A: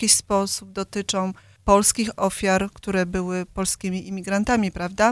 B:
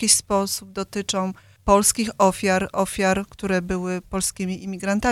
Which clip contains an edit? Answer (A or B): A